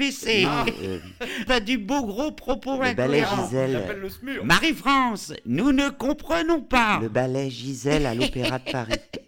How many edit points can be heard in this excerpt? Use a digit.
1